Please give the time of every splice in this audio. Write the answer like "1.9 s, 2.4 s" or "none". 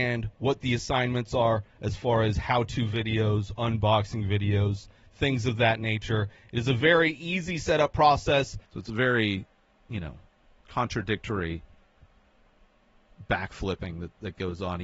8.6 s